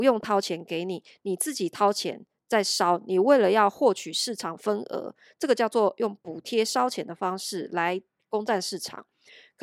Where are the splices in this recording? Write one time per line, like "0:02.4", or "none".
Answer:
none